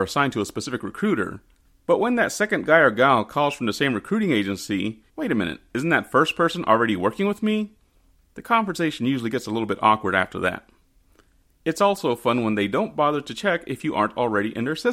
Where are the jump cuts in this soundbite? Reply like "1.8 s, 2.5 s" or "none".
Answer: 5.1 s